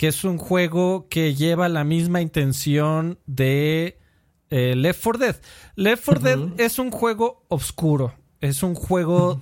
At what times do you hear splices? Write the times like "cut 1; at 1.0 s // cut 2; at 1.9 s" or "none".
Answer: none

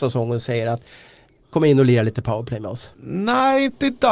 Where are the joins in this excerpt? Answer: cut 1; at 1.4 s // cut 2; at 2.9 s

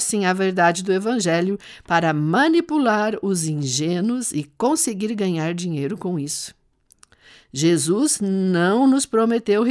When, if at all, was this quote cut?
none

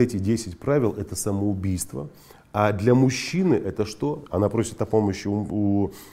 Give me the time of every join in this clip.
cut 1; at 4.3 s

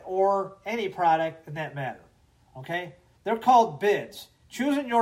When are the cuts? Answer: cut 1; at 3.1 s

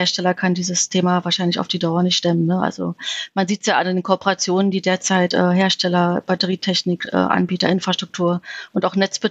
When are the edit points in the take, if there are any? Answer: none

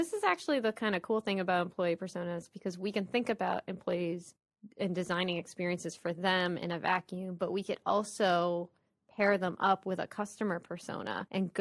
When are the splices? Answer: none

